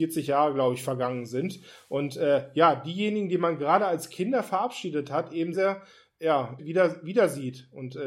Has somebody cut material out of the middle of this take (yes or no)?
yes